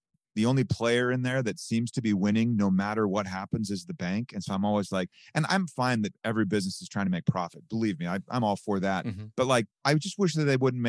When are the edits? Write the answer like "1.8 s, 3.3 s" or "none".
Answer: 9.8 s

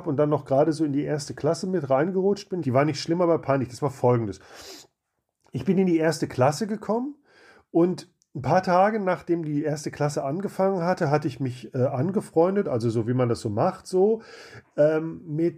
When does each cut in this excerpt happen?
2.6 s

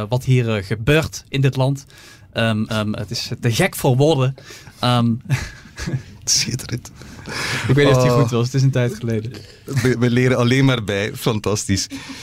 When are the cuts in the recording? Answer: none

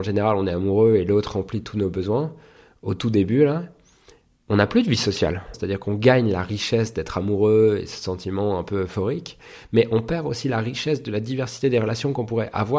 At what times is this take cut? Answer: 5.5 s

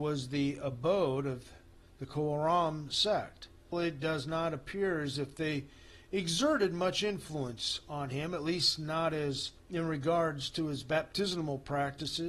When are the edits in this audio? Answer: 3.7 s, 9.6 s

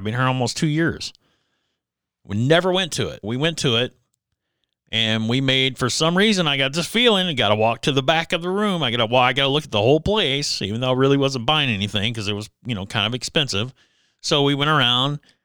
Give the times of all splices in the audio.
3.2 s

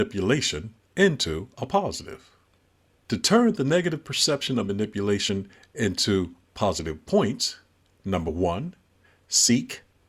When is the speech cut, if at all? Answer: none

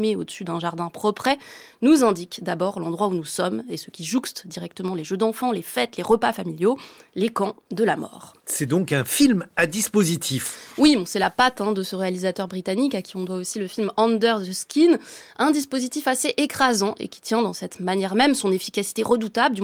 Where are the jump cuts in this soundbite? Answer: 8.4 s

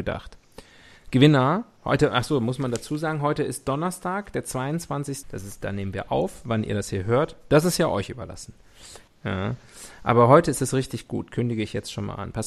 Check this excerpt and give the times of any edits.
5.2 s, 9.1 s

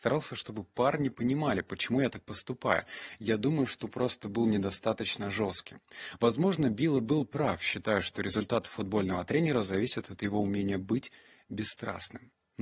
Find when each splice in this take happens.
none

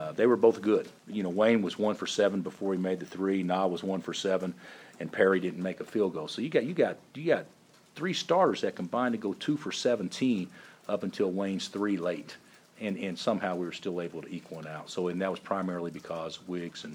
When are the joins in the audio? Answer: 1.0 s

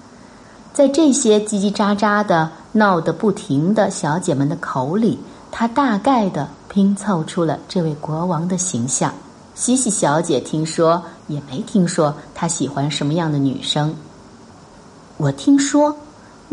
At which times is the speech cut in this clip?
9.4 s, 11.2 s

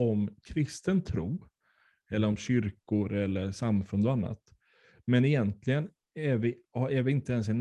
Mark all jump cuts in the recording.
none

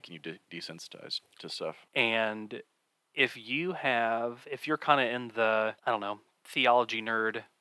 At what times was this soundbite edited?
1.9 s, 5.8 s

